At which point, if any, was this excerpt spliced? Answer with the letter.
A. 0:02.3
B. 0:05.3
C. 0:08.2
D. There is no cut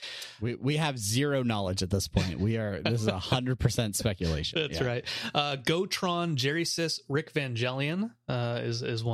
D